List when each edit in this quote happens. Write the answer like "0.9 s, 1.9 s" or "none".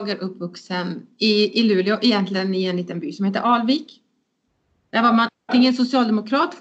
none

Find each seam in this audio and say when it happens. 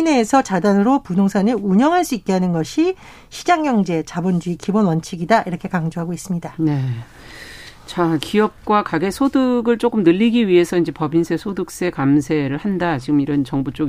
8.2 s

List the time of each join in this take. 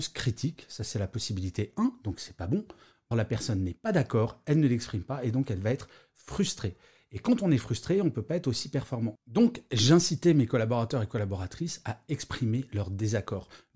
3.1 s

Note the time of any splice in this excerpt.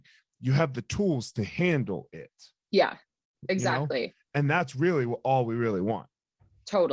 none

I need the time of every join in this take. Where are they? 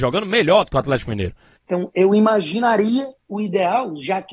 1.6 s

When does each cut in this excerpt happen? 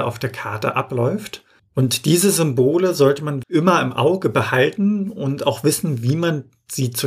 1.6 s, 3.4 s

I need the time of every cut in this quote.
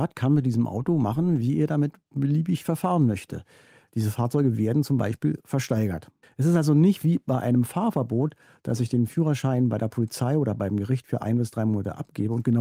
6.2 s

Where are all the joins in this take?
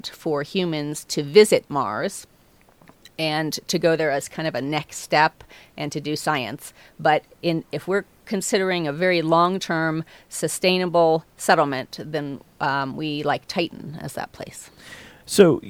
none

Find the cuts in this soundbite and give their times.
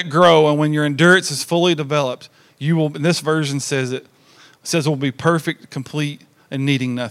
none

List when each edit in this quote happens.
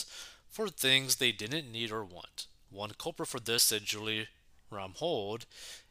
none

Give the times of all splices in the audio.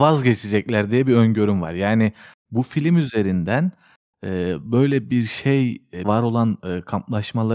6.0 s

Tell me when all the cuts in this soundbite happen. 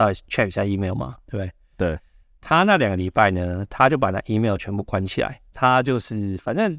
5.5 s

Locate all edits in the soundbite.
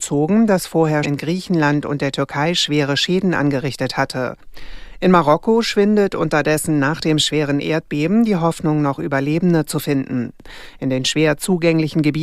1.0 s

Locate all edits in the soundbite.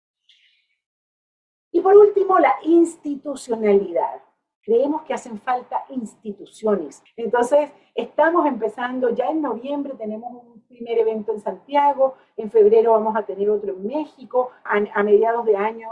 7.1 s, 14.7 s

